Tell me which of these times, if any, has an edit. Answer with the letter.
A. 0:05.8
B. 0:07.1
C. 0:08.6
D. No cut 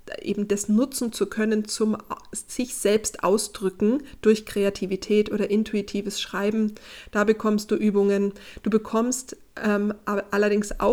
D